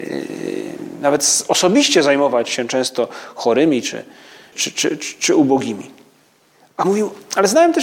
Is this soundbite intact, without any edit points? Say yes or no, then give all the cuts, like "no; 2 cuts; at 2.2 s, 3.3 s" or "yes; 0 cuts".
no; 1 cut; at 4.5 s